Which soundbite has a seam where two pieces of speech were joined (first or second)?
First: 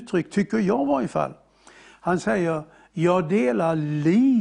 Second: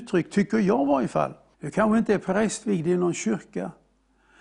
second